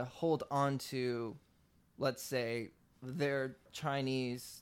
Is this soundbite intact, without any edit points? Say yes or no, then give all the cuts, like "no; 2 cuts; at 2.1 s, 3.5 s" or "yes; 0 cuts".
yes; 0 cuts